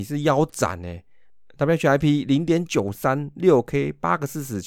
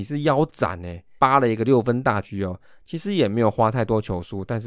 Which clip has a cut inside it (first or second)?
second